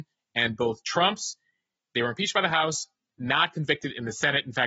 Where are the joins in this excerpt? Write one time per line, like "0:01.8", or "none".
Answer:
none